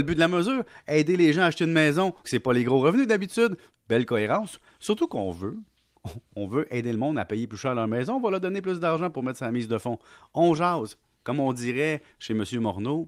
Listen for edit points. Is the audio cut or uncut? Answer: cut